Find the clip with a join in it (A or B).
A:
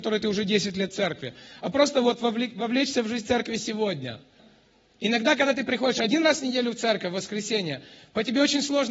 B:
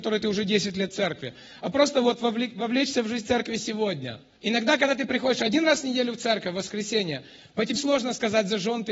B